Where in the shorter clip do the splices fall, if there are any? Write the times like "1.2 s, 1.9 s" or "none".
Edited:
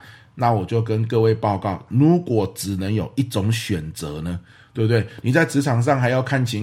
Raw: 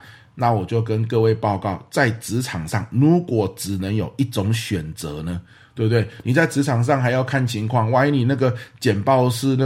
1.9 s